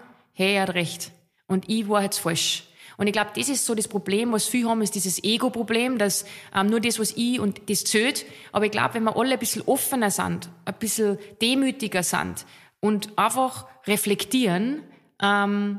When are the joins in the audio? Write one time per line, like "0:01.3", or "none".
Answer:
none